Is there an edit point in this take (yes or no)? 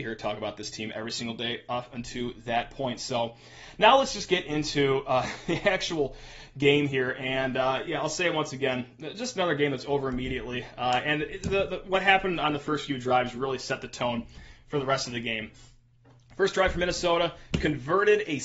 no